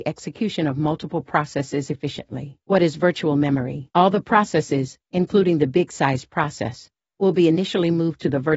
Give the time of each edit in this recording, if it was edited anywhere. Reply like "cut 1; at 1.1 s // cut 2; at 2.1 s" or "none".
cut 1; at 3.9 s

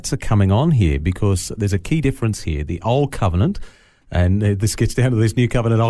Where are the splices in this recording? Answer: none

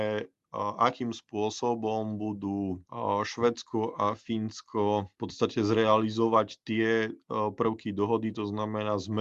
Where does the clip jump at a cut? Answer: none

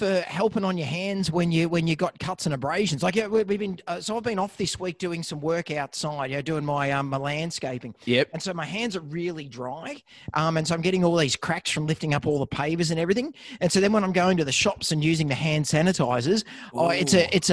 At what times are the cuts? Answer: none

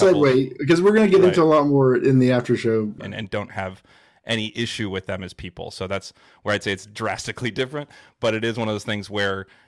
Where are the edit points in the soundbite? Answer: cut 1; at 3.0 s

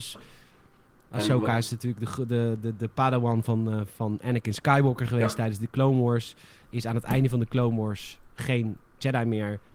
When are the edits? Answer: none

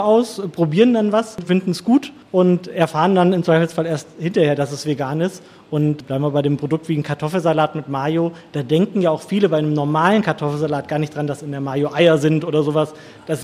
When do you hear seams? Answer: none

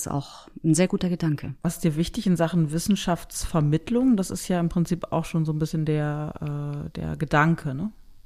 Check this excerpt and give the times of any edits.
cut 1; at 1.6 s

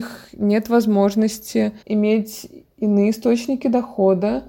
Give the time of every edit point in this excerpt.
cut 1; at 1.8 s

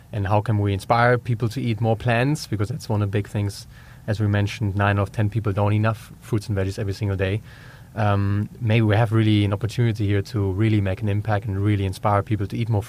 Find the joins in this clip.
none

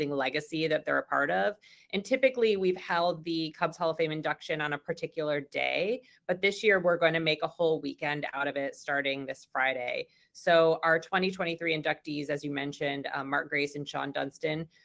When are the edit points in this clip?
none

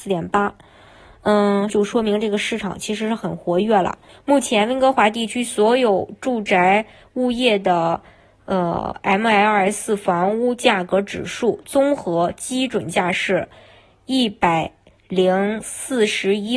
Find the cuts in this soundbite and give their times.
cut 1; at 1.7 s // cut 2; at 4.1 s

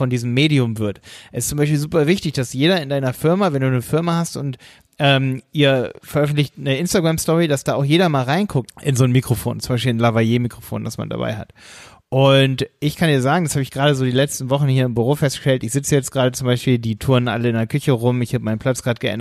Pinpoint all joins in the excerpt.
cut 1; at 8.7 s

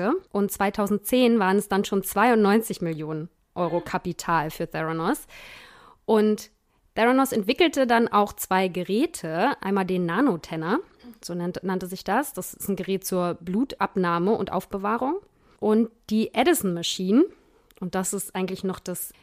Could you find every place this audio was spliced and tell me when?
none

